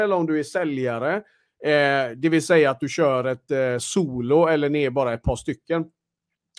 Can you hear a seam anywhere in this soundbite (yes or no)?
no